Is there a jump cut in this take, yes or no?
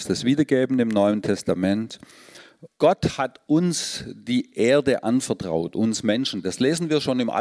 yes